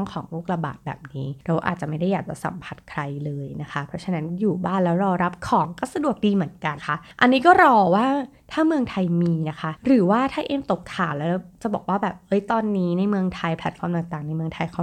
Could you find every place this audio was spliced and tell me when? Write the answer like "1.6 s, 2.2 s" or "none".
6.8 s

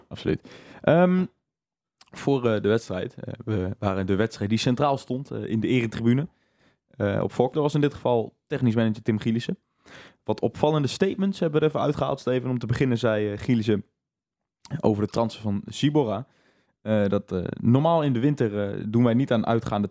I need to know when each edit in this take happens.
7.5 s

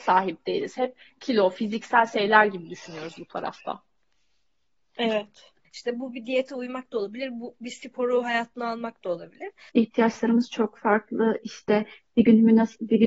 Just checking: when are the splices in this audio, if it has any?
5.6 s, 9.7 s

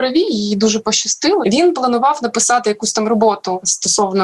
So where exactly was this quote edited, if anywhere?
1.4 s

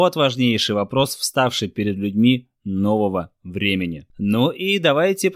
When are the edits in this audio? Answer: 4.1 s

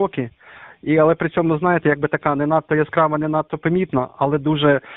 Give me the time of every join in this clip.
none

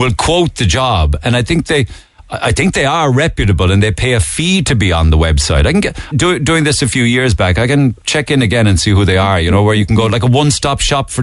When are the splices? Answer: 6.1 s

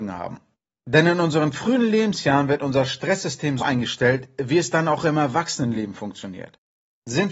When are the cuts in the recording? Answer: 3.6 s

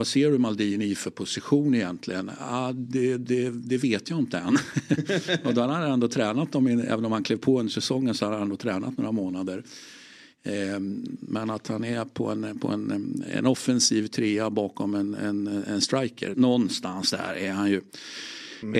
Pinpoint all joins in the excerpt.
11.2 s, 16.3 s

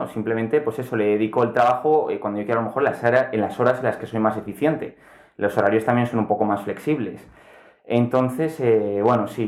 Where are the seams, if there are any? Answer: none

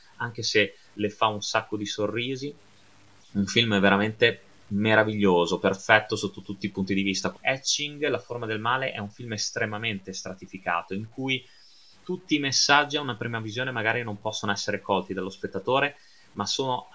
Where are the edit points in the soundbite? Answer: 7.3 s

